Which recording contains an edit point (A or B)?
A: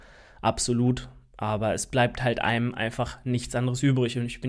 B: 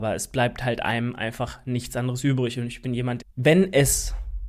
B